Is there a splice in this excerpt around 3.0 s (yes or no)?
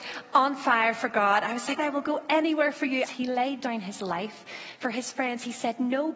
yes